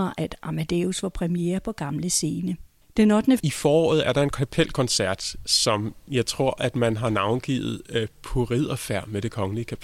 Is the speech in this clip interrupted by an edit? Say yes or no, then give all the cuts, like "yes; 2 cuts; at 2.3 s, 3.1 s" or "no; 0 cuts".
yes; 1 cut; at 3.4 s